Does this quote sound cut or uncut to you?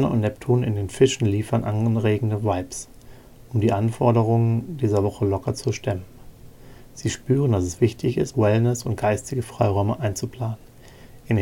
cut